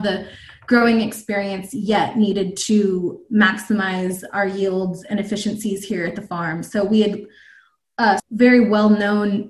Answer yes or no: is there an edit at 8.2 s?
yes